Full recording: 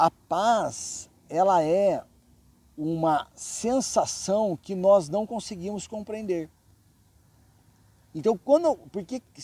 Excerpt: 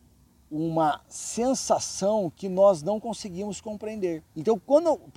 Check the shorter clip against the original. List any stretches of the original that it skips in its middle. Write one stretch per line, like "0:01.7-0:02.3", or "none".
0:06.5-0:08.0